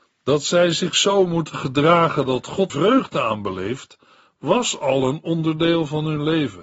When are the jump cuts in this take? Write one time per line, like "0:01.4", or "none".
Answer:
0:02.7

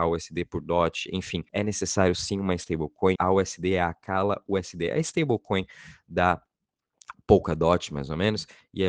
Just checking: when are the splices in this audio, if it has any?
0:01.5
0:03.2

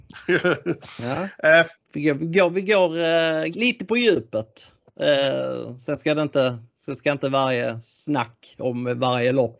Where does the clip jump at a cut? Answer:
0:01.7
0:03.5

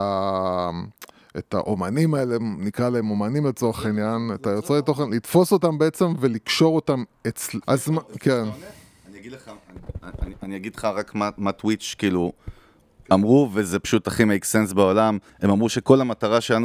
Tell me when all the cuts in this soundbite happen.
0:07.6
0:15.3

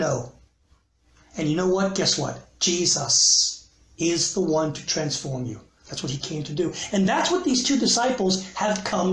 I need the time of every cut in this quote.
none

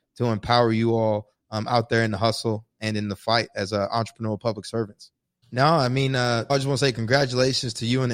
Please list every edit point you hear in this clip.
0:05.4
0:06.5

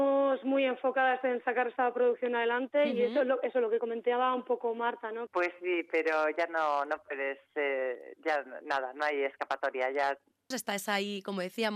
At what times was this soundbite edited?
0:05.3
0:10.5

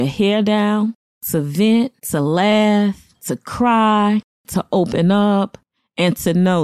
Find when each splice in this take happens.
0:02.0

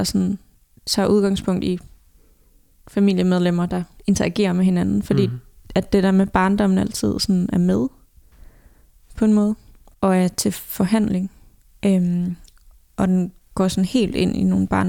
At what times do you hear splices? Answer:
0:11.7

